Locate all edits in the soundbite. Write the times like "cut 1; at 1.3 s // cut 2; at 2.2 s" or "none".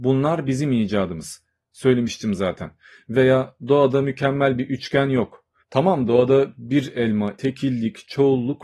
cut 1; at 5.6 s // cut 2; at 7.4 s